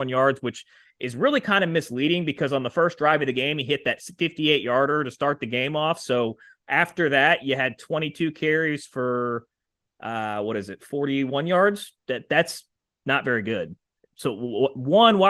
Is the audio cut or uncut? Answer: uncut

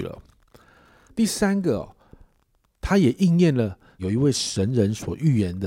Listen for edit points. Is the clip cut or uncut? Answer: cut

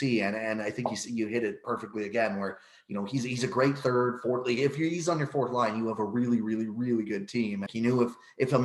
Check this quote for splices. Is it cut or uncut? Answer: cut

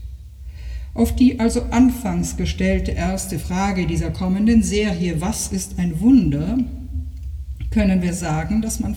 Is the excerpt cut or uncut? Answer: uncut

